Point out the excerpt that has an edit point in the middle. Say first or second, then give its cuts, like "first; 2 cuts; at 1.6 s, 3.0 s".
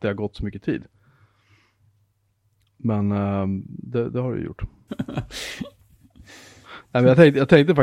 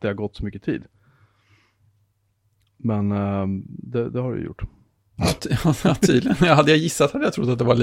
first; 1 cut; at 4.9 s